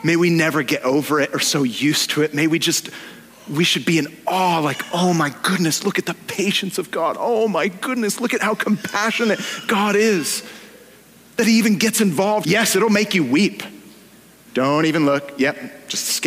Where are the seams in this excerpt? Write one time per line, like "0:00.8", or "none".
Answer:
0:12.4
0:14.5

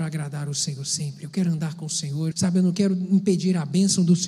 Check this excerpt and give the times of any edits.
0:02.3

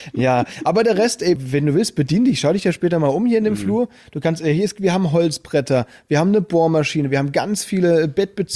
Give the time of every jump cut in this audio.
0:01.4

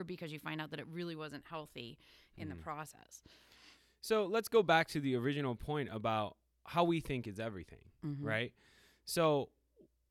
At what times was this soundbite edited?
none

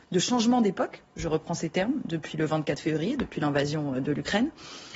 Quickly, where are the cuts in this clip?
none

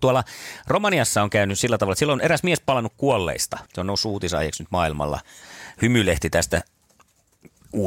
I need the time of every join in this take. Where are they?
0:03.7

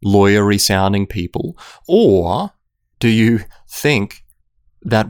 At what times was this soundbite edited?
0:02.9

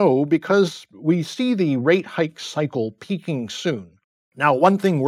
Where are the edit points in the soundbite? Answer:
0:00.9

